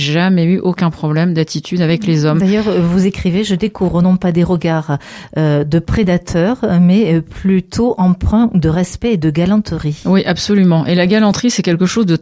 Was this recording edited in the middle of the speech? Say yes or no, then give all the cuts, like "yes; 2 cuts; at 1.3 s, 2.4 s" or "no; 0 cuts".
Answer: no; 0 cuts